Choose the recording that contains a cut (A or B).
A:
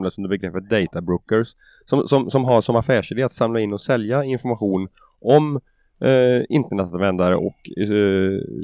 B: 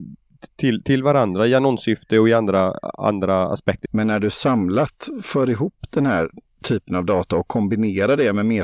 B